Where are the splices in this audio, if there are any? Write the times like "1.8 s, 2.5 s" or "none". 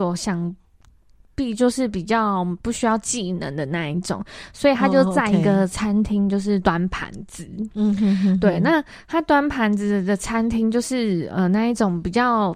none